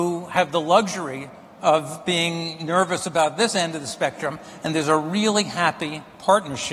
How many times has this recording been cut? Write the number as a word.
one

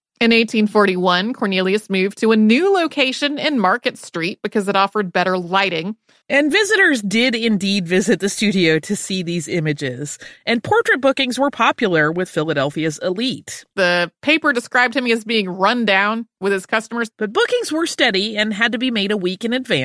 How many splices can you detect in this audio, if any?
three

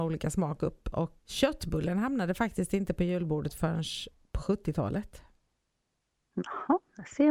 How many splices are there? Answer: one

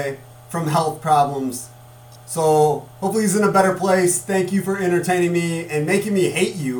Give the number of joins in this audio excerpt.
zero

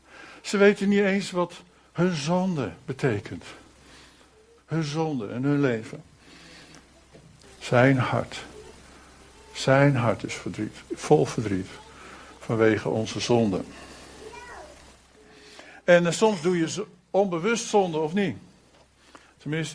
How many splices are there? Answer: two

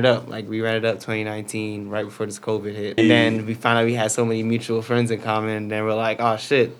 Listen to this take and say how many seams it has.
one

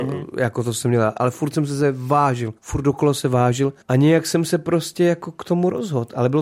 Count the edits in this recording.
two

